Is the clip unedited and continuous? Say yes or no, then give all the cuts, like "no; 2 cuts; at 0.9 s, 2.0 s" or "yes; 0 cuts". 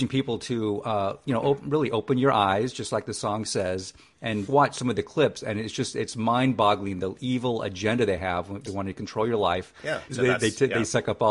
no; 3 cuts; at 4.5 s, 8.7 s, 10.1 s